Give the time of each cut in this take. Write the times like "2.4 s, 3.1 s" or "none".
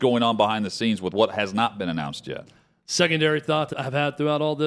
3.7 s